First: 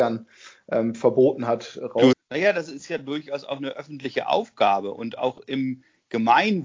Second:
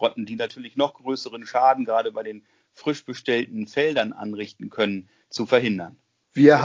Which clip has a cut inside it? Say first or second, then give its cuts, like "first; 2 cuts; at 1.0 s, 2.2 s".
first; 1 cut; at 2.1 s